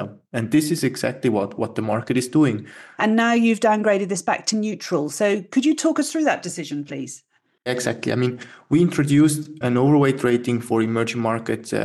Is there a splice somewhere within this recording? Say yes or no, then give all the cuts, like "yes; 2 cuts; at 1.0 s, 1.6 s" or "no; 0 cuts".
yes; 2 cuts; at 3.0 s, 9.6 s